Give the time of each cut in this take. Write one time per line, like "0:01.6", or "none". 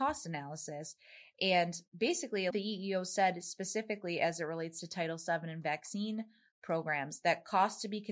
0:01.3
0:02.5

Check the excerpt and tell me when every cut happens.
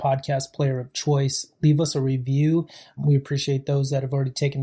none

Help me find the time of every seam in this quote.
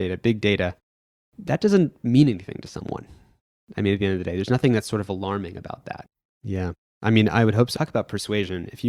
0:06.3
0:07.7

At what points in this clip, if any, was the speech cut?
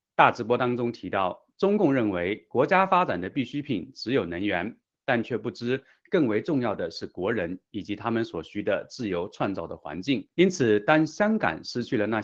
0:10.3

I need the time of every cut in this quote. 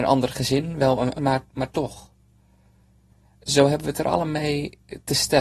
0:01.2

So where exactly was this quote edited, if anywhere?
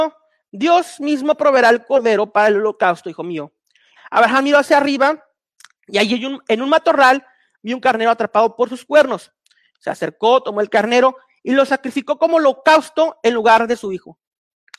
0:04.0

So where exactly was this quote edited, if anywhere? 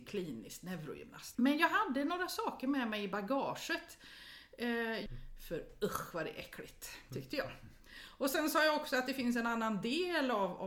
0:01.3
0:05.1

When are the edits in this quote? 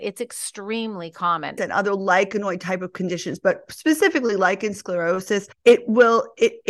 0:01.6

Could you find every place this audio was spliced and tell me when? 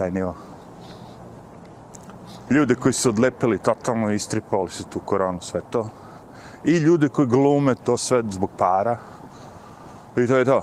0:02.5

